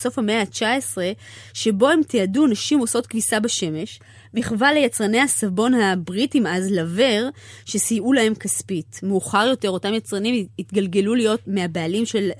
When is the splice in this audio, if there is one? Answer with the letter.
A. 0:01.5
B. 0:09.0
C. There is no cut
C